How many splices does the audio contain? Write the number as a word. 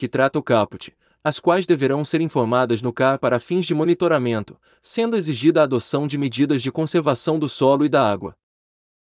zero